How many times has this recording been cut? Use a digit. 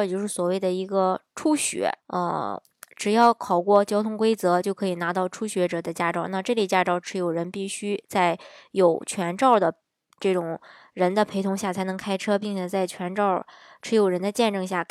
1